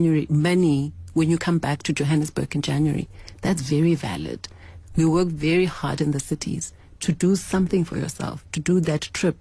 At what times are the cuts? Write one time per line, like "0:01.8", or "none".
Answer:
0:04.8